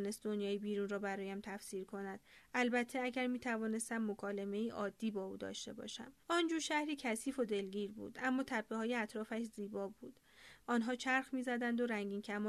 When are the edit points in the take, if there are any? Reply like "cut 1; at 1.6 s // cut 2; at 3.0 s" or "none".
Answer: cut 1; at 6.2 s // cut 2; at 10.6 s